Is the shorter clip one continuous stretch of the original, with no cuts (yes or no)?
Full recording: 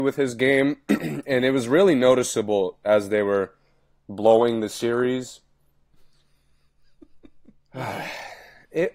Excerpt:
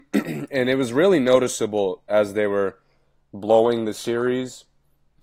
yes